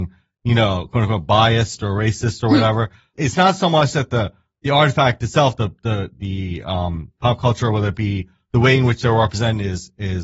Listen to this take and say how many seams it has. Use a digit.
1